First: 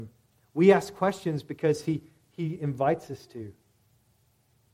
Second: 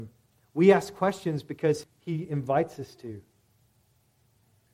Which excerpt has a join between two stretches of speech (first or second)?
second